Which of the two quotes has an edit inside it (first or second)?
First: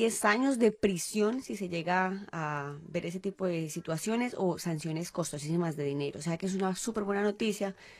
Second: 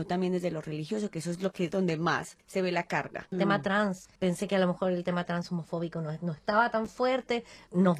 second